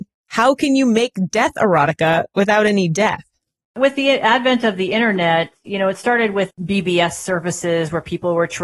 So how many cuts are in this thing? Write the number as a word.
two